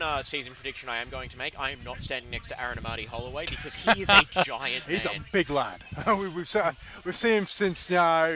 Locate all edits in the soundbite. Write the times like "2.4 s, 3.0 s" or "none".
none